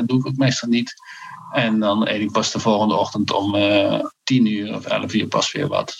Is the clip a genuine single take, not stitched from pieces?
yes; 0 cuts

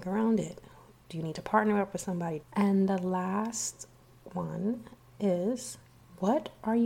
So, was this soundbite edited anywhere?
yes; 1 cut; at 2.4 s

